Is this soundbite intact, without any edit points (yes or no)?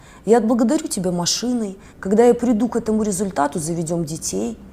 no